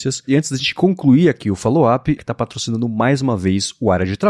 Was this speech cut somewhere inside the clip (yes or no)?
yes